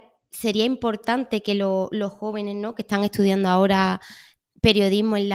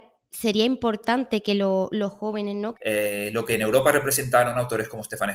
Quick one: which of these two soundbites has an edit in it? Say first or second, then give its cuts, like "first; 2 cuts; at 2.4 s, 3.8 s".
second; 1 cut; at 2.7 s